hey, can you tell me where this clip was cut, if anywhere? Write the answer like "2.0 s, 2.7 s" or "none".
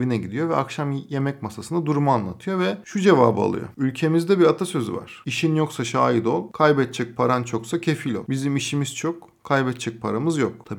none